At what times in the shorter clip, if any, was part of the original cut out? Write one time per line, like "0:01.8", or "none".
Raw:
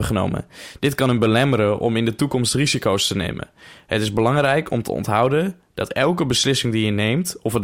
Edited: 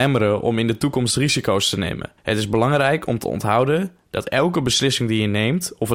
0:02.2